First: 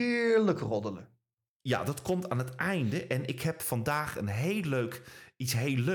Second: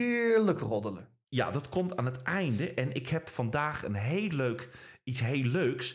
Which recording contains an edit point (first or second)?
second